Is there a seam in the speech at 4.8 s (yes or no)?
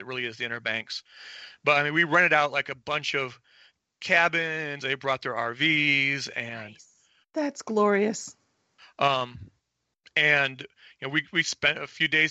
yes